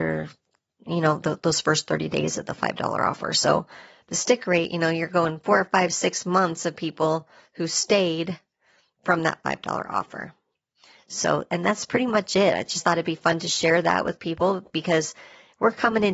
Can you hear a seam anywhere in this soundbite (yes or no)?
no